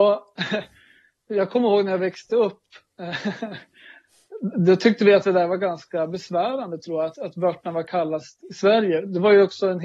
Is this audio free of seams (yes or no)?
no